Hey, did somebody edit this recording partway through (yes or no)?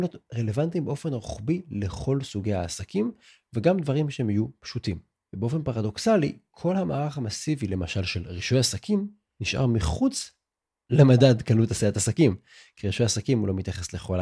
no